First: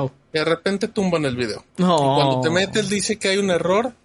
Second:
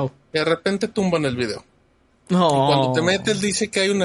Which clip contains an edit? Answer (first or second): first